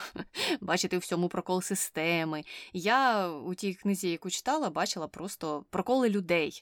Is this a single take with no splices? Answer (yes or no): no